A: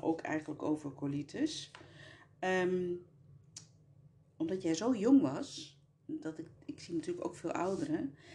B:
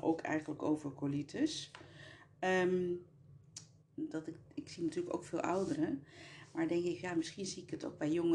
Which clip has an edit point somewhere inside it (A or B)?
B